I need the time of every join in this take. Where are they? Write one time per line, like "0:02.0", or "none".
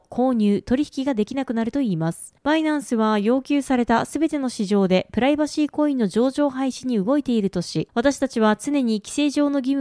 0:02.4